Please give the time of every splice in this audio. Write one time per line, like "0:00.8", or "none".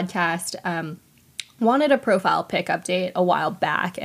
none